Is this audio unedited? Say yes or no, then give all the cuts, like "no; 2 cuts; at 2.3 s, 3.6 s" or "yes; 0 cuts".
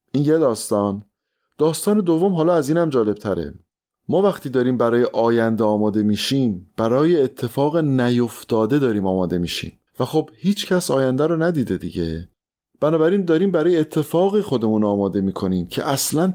no; 1 cut; at 9.9 s